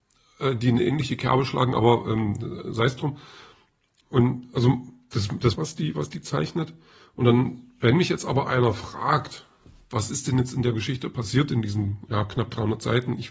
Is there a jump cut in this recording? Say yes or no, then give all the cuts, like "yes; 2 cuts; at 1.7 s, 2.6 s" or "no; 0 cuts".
yes; 1 cut; at 5.5 s